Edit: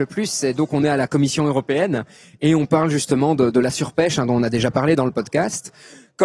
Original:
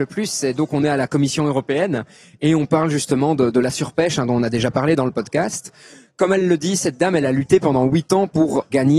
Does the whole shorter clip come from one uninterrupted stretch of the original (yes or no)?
yes